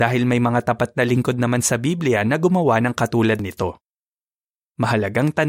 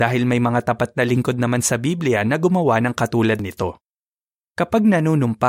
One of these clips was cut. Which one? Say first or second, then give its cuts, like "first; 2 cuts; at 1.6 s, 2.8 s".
second; 1 cut; at 4.4 s